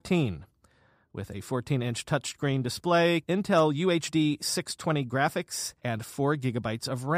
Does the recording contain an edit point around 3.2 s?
yes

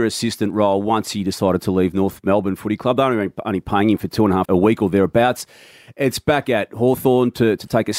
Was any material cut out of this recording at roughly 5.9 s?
no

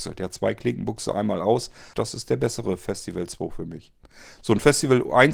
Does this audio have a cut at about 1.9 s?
yes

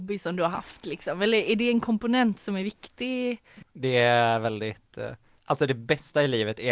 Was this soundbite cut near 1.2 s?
no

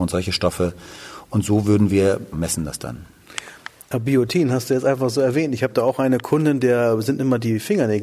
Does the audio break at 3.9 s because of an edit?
no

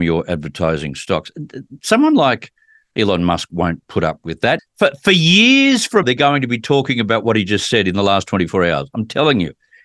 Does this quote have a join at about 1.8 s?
no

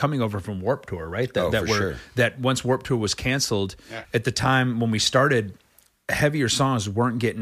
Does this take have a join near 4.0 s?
yes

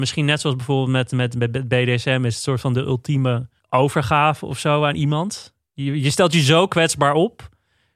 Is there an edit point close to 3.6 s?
yes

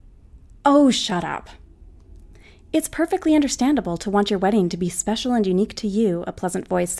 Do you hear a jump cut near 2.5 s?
no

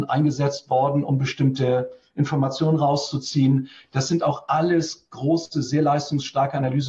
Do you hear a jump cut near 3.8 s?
no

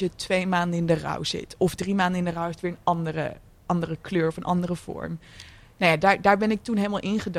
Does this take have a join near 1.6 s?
no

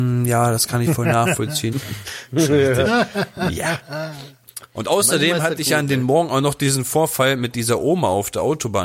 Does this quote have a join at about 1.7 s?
yes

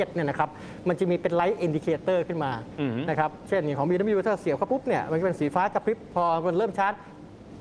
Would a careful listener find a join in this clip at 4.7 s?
yes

